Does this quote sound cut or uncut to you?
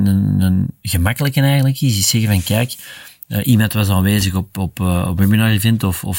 uncut